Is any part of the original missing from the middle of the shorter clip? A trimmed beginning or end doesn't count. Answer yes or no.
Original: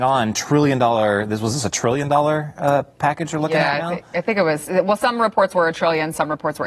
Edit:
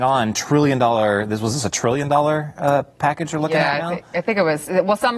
no